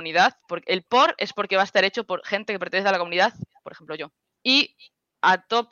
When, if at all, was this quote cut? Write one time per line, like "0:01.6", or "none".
0:04.3